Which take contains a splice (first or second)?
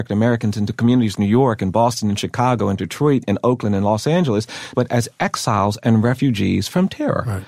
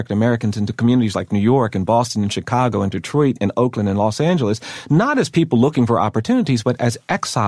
first